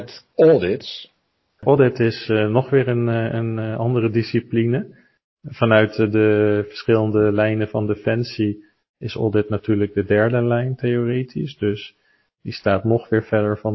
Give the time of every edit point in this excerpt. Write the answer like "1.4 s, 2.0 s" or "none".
none

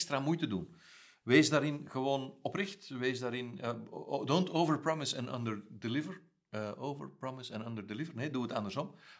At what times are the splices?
none

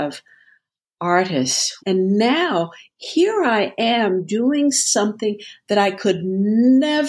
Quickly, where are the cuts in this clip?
1.8 s

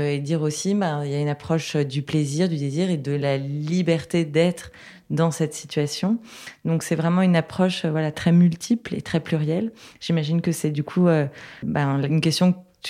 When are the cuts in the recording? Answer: 8.1 s, 11.6 s

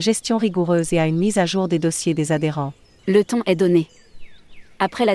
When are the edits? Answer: 3.0 s

